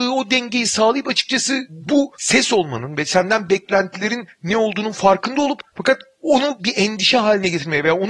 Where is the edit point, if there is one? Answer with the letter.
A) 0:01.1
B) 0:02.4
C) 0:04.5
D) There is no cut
D